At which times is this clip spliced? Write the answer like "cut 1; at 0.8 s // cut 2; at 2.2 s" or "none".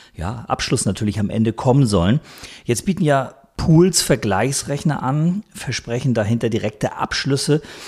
none